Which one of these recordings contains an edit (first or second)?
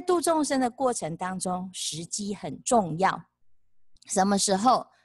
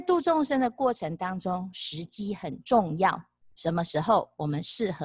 second